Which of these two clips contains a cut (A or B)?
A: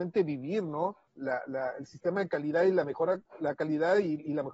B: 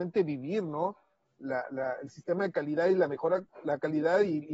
A